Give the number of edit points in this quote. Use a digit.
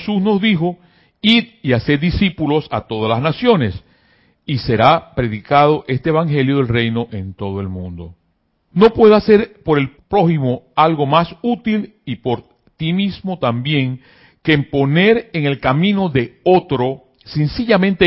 2